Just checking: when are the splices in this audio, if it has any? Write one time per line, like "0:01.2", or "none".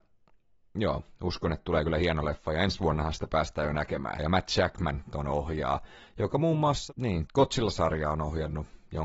0:04.2
0:07.3